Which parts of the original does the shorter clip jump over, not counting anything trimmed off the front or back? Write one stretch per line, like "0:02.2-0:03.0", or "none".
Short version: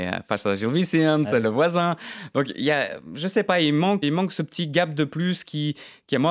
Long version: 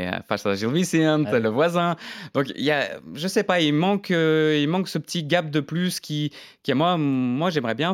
0:04.0-0:04.6